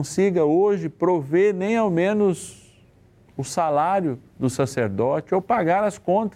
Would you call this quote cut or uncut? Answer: uncut